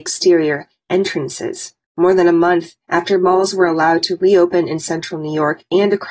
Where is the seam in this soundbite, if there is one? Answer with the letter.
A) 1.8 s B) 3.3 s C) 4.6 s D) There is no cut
A